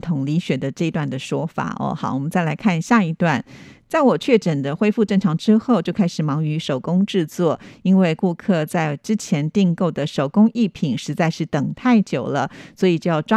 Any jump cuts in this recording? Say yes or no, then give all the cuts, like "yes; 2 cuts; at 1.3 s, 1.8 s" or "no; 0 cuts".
no; 0 cuts